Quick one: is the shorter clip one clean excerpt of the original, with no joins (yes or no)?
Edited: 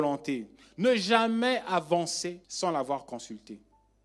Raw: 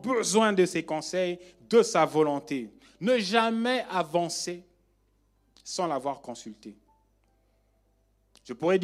no